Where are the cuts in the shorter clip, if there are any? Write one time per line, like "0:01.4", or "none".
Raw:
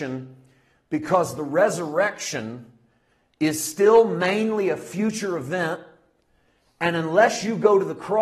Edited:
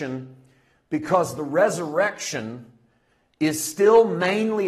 none